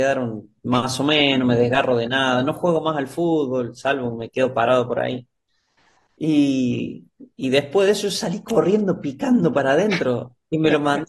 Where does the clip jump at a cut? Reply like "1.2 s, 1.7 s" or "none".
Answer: none